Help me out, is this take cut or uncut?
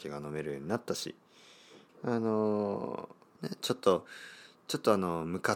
cut